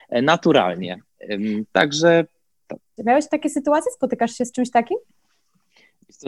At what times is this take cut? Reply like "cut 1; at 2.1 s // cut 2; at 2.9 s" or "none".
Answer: cut 1; at 3.0 s